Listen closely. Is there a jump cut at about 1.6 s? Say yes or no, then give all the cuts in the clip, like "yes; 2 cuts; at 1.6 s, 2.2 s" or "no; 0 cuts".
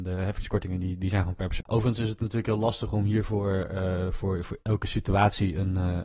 yes; 1 cut; at 1.6 s